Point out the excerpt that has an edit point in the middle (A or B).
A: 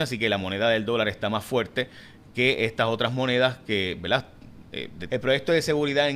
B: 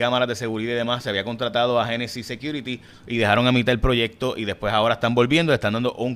A